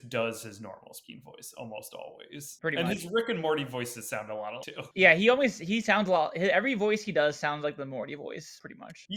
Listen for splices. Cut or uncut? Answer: cut